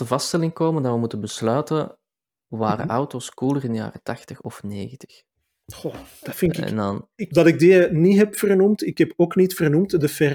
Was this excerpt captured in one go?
no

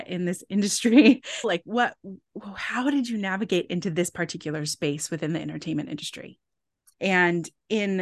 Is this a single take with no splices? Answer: no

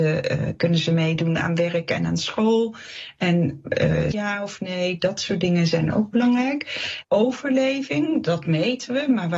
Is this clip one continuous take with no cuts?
no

